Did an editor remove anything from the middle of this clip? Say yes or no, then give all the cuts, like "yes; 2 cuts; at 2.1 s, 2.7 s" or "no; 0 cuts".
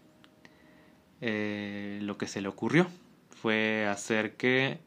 no; 0 cuts